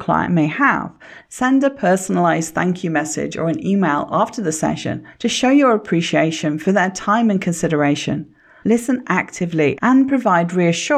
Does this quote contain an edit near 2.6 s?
no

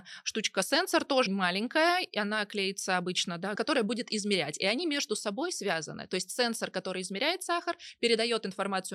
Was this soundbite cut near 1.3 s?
yes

